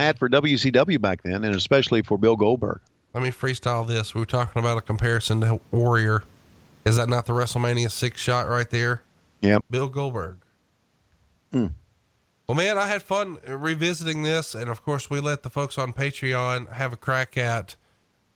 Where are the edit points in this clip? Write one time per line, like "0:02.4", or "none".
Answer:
0:09.6